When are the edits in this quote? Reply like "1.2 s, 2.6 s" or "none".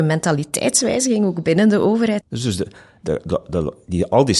2.2 s